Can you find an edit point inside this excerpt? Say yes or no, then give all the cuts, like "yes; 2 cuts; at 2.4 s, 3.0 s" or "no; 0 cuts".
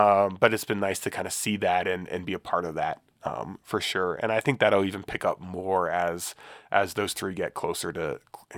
no; 0 cuts